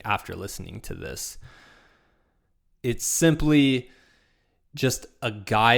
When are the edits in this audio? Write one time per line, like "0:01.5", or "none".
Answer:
0:02.7